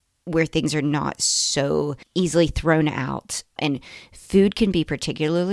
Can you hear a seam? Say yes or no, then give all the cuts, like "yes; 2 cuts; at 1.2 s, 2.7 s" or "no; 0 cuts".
yes; 1 cut; at 3.6 s